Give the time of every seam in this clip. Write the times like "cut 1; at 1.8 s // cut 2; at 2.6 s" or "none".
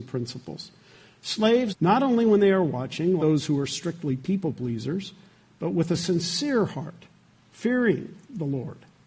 cut 1; at 1.7 s // cut 2; at 3.2 s